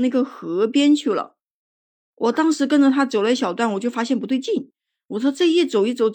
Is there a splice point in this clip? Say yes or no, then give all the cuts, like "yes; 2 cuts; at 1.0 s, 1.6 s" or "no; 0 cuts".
no; 0 cuts